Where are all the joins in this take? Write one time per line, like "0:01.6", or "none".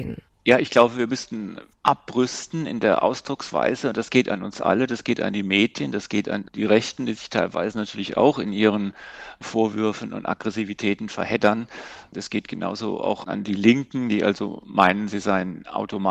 none